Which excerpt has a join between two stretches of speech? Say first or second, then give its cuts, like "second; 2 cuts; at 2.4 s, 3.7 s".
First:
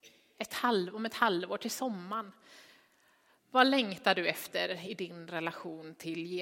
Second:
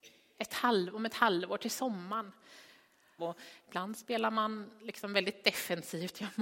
second; 1 cut; at 3.2 s